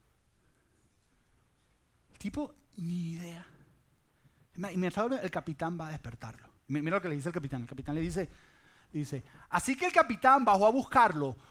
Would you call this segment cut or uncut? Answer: uncut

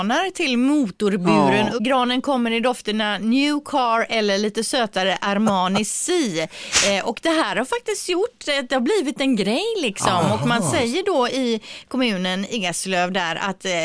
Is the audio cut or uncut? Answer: cut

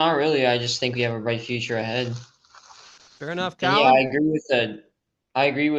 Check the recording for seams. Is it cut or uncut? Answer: uncut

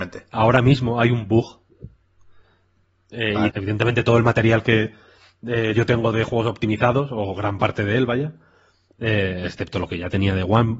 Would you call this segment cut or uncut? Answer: cut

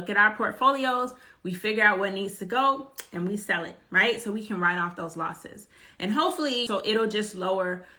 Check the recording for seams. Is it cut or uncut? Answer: cut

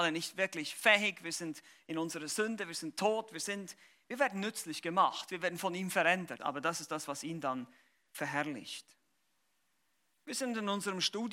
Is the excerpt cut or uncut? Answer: cut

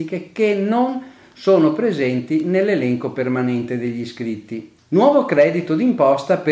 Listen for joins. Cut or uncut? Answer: cut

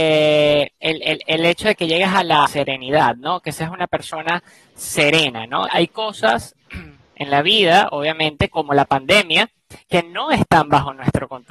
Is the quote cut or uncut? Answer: cut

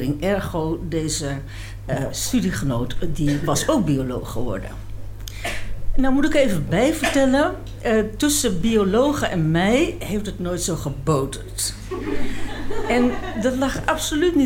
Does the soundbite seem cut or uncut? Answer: uncut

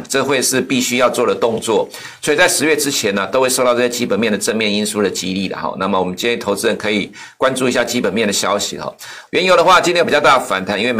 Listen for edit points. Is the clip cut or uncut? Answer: cut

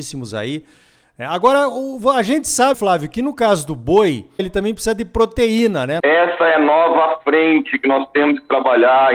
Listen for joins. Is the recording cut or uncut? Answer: cut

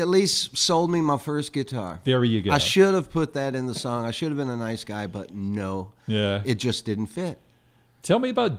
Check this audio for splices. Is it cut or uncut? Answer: uncut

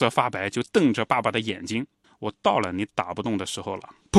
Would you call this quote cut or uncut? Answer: cut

